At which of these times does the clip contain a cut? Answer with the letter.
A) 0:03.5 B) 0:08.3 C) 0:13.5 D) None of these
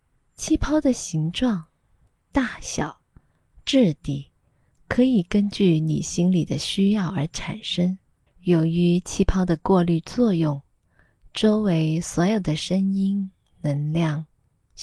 B